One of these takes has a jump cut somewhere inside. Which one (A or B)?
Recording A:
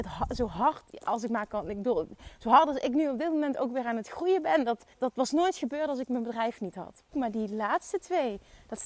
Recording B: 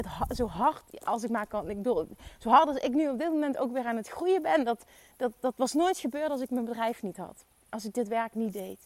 A